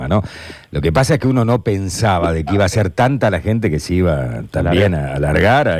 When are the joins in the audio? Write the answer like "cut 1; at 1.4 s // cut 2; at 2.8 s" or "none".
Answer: none